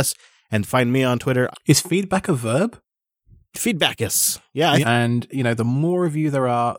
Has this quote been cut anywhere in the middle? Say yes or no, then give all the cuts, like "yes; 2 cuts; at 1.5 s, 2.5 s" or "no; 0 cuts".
yes; 2 cuts; at 1.5 s, 4.8 s